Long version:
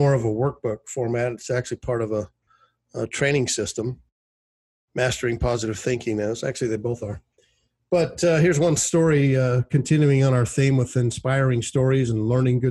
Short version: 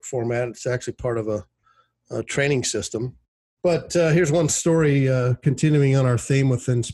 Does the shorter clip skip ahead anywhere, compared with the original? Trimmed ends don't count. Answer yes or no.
yes